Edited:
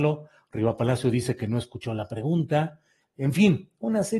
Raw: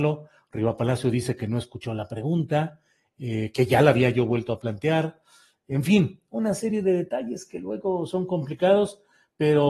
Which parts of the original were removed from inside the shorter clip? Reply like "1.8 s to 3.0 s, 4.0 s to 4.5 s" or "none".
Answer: 3.0 s to 5.5 s